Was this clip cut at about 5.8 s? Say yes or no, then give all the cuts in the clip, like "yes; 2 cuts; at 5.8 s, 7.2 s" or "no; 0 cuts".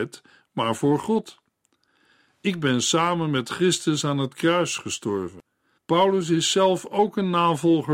yes; 1 cut; at 5.8 s